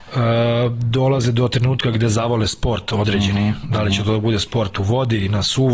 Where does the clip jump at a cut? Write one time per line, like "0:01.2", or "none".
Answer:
none